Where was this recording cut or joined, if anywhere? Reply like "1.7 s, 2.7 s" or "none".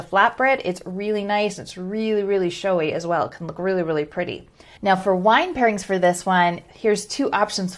none